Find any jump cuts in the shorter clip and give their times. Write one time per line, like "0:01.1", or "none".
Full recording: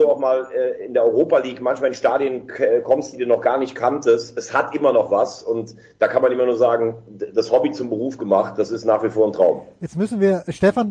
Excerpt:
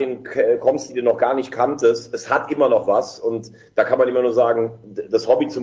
none